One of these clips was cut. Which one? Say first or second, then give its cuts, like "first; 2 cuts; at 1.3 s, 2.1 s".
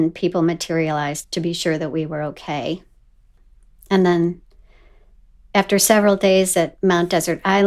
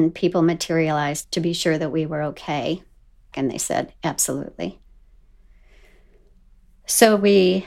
second; 1 cut; at 3.3 s